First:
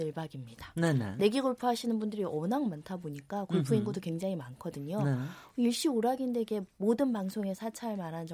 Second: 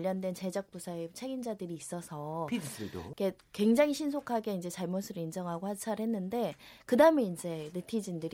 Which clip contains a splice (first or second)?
second